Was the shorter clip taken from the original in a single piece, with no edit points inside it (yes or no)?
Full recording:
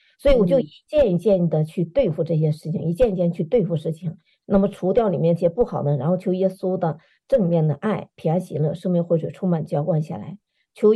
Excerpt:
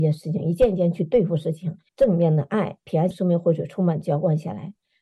no